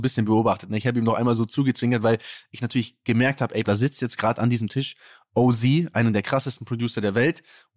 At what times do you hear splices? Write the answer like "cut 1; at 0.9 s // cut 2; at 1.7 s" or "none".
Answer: cut 1; at 3.6 s

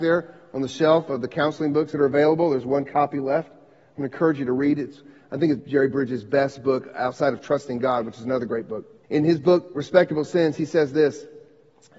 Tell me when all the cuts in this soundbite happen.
cut 1; at 5.6 s // cut 2; at 9.0 s

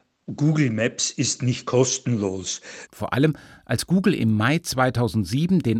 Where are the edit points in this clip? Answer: cut 1; at 2.9 s

